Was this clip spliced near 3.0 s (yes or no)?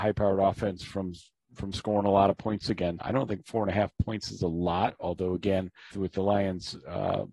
yes